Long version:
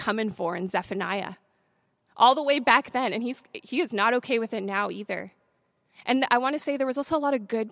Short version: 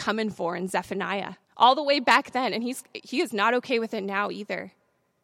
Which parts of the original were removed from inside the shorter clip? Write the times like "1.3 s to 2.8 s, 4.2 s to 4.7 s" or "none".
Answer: 1.4 s to 2.0 s

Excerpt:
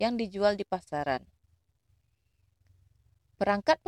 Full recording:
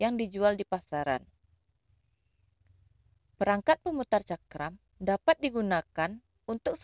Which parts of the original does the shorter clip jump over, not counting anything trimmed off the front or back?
none

